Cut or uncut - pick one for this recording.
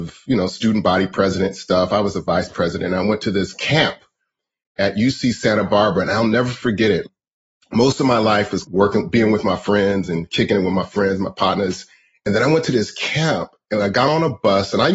uncut